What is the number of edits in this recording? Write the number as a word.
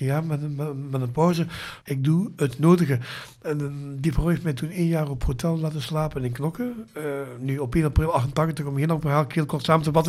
one